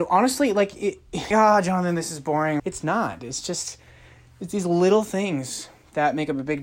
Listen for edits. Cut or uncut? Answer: cut